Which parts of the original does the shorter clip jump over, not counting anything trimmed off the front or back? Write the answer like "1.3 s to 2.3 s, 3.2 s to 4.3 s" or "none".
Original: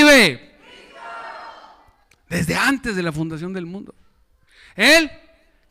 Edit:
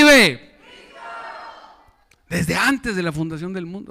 none